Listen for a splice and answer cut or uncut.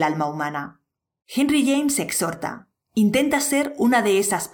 cut